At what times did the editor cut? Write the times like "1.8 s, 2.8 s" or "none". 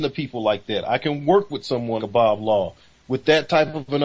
2.0 s